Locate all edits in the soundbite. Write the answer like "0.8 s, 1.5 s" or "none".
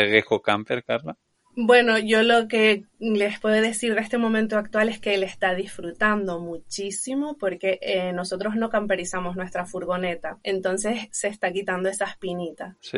none